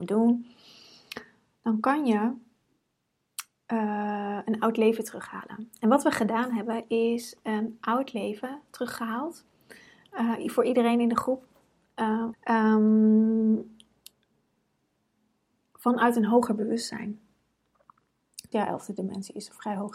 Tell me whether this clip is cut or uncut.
cut